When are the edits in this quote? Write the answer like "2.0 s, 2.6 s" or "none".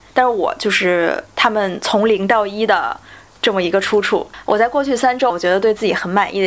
5.3 s